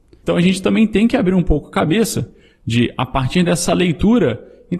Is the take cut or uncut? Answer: uncut